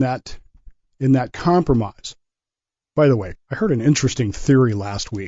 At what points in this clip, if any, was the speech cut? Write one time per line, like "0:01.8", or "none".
0:03.4